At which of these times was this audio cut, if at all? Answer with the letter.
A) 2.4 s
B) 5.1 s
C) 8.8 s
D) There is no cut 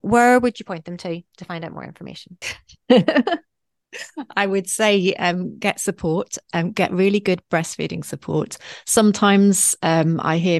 A